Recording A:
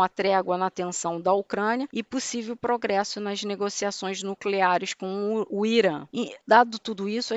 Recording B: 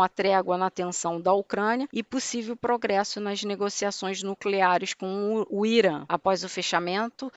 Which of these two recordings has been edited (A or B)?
B